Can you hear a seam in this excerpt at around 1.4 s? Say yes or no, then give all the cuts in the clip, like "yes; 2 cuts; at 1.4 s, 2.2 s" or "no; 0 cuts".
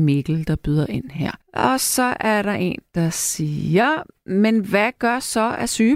yes; 1 cut; at 1.4 s